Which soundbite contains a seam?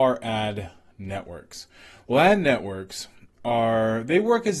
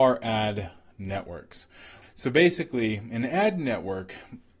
second; 1 cut; at 2.0 s

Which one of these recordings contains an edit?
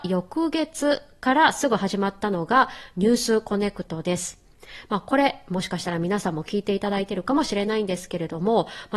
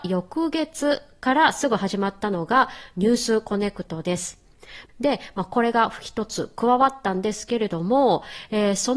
second; 1 cut; at 4.9 s

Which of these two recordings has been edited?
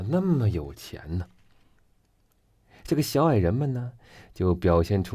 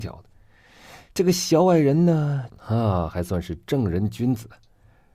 second; 1 cut; at 2.5 s

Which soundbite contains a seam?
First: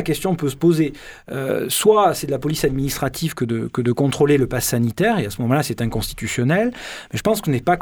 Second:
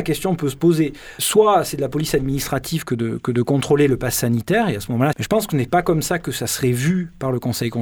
second; 2 cuts; at 1.2 s, 5.1 s

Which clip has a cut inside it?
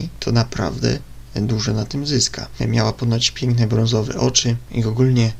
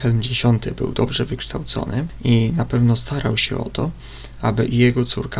first; 1 cut; at 2.6 s

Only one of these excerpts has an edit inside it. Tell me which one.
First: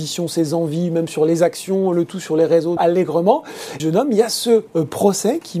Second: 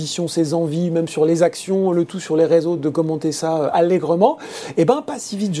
first; 2 cuts; at 2.8 s, 3.8 s

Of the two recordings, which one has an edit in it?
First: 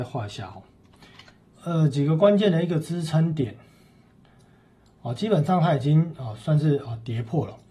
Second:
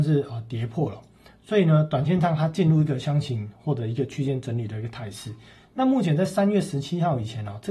first; 1 cut; at 1.5 s

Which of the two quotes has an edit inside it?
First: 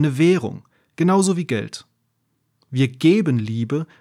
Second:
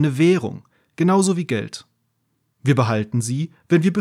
second; 1 cut; at 2.5 s

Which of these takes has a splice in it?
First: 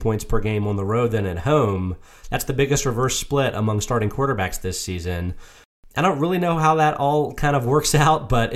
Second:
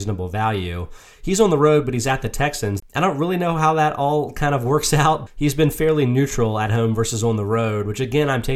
second; 2 cuts; at 2.8 s, 5.3 s

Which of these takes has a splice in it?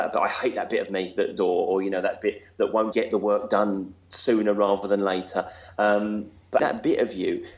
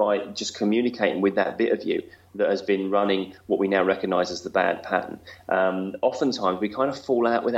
first; 3 cuts; at 1.4 s, 2.9 s, 6.6 s

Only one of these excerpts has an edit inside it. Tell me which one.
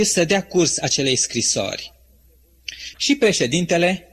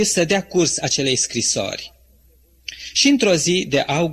first; 1 cut; at 2.9 s

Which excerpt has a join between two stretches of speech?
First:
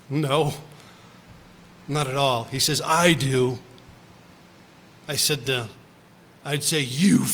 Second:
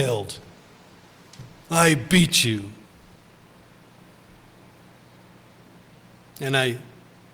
first; 1 cut; at 6.3 s

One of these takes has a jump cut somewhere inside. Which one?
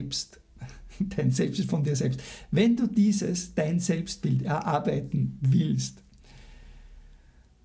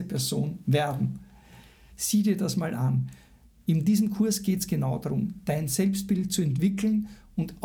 second; 1 cut; at 1.9 s

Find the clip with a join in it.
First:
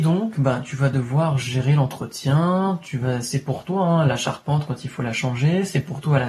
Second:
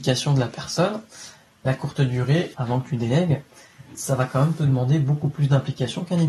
second; 1 cut; at 2.5 s

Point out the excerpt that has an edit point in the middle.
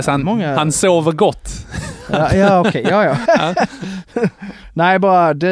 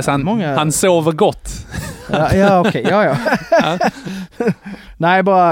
first; 1 cut; at 3.3 s

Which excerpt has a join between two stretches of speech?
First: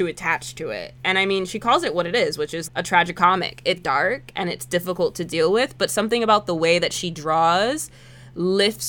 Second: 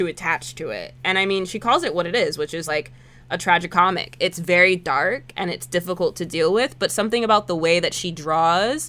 first; 2 cuts; at 2.7 s, 3.8 s

